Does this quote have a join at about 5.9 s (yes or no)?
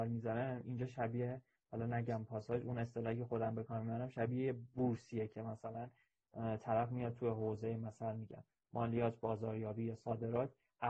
no